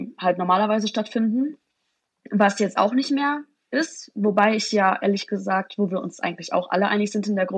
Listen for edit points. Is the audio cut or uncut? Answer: uncut